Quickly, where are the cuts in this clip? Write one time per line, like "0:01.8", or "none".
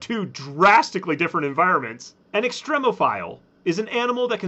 0:02.2